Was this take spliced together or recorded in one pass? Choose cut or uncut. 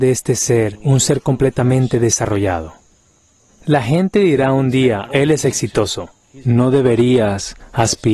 cut